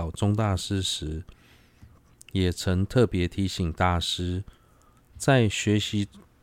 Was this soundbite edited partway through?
no; 0 cuts

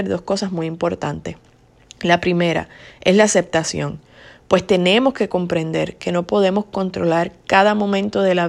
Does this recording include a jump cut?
no; 0 cuts

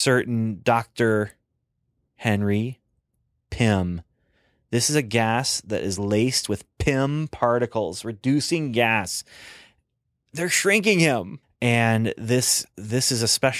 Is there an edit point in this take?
yes; 1 cut; at 11.4 s

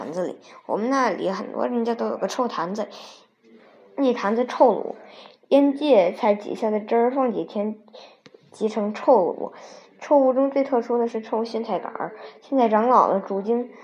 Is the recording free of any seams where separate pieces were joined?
yes; 0 cuts

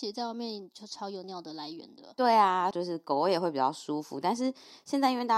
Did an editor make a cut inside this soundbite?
yes; 2 cuts; at 1.2 s, 2.7 s

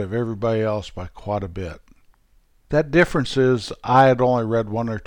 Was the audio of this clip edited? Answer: no; 0 cuts

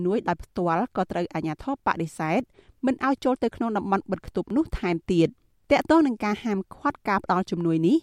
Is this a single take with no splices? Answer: yes; 0 cuts

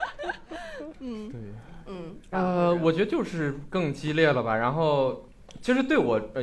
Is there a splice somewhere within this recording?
yes; 1 cut; at 2.3 s

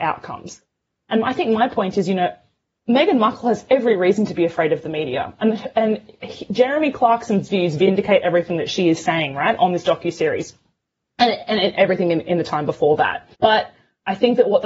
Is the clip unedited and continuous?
no; 1 cut; at 13.3 s

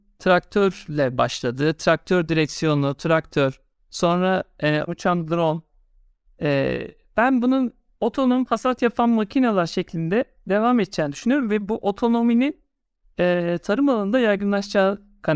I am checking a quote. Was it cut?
yes; 1 cut; at 4.9 s

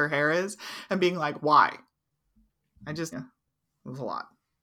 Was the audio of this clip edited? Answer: yes; 1 cut; at 3.1 s

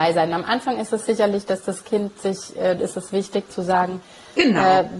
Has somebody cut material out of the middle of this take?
yes; 1 cut; at 2.8 s

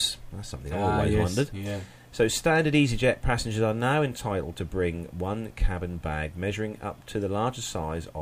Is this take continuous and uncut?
yes; 0 cuts

